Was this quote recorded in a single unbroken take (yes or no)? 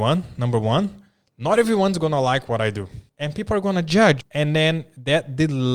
no